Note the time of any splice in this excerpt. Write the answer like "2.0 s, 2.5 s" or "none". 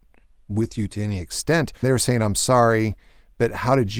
1.8 s